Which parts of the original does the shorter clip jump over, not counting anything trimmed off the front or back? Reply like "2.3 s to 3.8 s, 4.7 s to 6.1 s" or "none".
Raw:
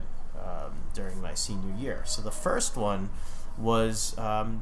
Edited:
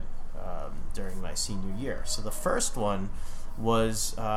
none